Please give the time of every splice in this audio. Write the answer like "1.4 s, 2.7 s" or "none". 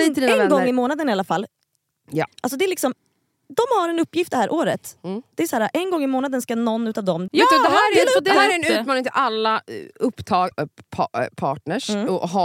2.3 s, 7.3 s, 10.5 s